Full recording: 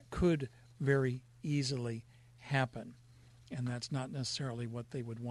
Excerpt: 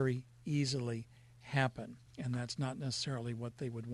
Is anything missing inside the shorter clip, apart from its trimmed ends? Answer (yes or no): yes